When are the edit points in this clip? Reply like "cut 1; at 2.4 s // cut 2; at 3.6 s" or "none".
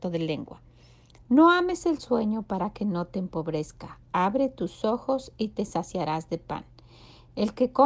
cut 1; at 1.2 s